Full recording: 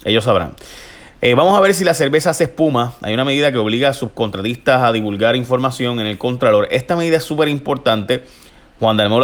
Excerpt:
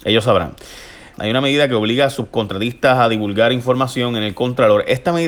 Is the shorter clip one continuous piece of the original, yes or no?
no